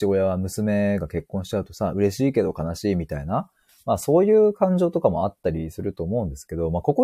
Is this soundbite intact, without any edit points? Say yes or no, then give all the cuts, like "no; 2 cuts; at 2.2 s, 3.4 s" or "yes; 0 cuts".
yes; 0 cuts